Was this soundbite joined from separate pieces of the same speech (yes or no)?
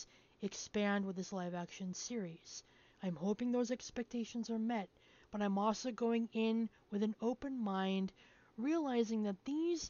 yes